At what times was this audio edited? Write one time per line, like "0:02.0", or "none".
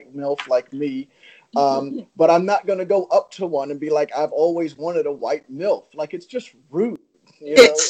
none